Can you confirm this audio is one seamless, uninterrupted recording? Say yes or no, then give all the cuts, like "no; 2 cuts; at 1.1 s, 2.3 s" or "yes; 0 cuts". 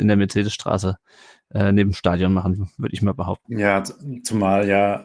no; 1 cut; at 3.4 s